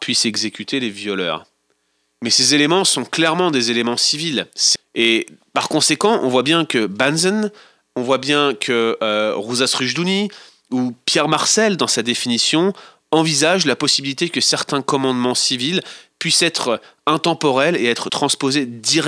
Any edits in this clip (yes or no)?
yes